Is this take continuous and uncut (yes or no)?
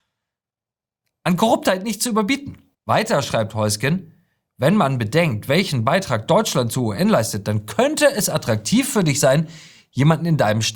no